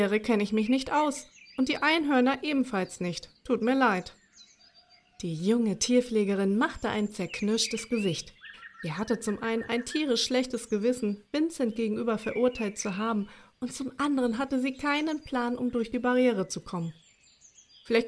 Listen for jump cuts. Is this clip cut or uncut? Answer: uncut